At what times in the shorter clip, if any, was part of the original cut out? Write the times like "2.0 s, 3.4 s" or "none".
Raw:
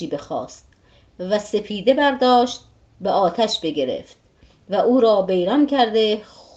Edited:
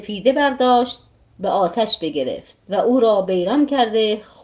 2.6 s